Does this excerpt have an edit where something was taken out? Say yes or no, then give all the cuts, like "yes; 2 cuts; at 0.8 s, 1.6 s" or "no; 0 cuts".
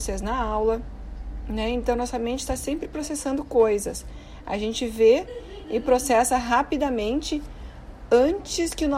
no; 0 cuts